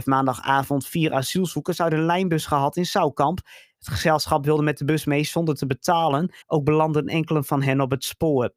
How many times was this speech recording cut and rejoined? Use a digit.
1